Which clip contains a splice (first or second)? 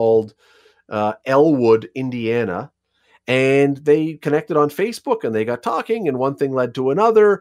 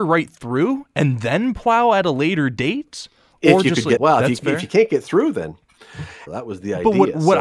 second